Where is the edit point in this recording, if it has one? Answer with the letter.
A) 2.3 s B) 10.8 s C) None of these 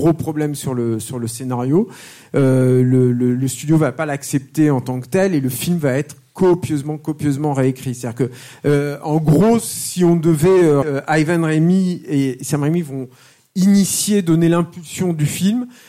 B